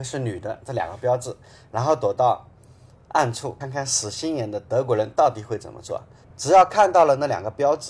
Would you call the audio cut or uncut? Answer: cut